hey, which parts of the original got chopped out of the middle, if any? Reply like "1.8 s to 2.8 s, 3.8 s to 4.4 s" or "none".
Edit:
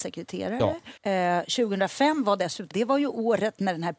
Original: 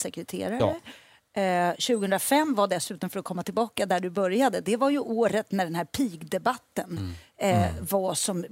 1.0 s to 1.3 s, 3.0 s to 4.6 s